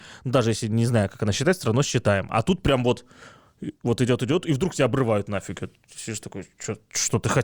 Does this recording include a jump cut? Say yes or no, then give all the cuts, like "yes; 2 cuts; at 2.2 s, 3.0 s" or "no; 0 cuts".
no; 0 cuts